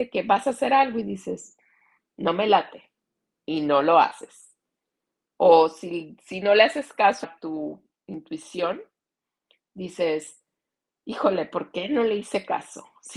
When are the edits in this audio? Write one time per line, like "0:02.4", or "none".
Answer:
0:07.2